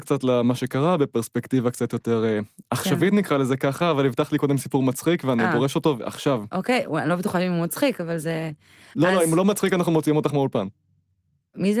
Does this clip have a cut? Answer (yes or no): no